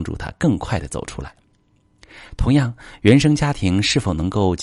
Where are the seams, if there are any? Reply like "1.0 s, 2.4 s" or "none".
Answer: none